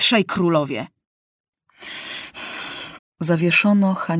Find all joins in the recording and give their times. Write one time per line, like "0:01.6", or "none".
0:03.0